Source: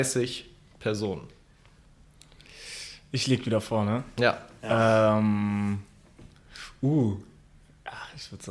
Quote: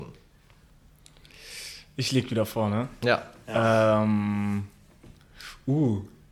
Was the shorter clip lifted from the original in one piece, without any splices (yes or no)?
yes